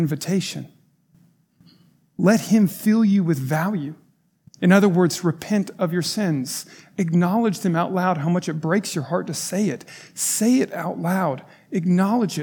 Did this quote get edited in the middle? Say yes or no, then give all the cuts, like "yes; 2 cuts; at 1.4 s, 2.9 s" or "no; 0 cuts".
yes; 1 cut; at 4.5 s